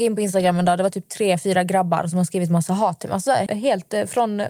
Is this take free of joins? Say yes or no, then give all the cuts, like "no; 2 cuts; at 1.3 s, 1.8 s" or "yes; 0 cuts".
no; 1 cut; at 3.5 s